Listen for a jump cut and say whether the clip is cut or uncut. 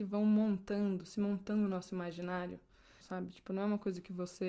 cut